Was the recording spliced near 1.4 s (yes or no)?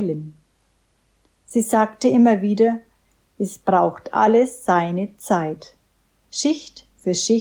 no